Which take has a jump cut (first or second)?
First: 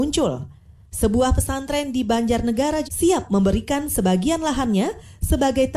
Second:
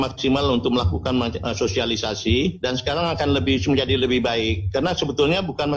first